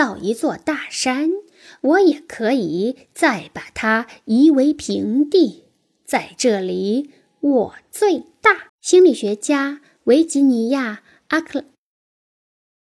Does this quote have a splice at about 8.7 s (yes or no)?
yes